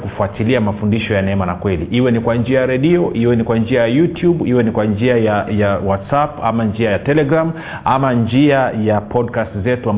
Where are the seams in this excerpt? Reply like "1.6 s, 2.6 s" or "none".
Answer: 5.5 s